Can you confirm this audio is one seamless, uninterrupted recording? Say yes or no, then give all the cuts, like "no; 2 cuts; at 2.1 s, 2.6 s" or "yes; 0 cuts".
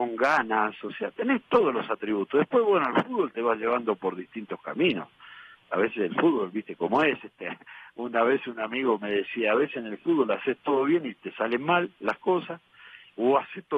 yes; 0 cuts